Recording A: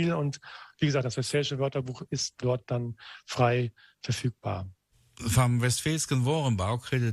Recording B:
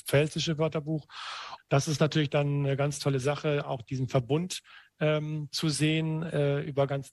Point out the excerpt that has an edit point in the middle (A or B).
B